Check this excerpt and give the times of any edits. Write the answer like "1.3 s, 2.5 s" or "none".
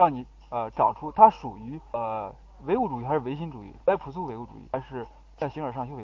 3.8 s